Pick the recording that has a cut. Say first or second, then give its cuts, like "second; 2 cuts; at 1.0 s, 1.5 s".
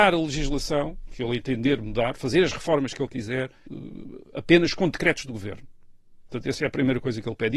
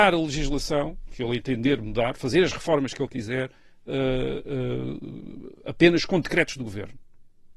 first; 1 cut; at 3.7 s